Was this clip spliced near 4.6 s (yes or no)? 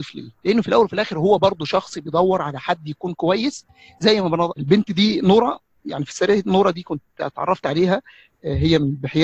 yes